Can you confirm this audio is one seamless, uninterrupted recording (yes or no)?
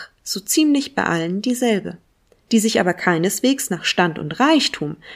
no